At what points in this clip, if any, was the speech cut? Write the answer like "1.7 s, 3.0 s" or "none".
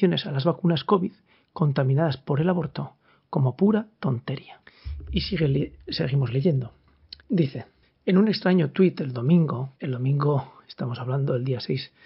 7.2 s, 9.7 s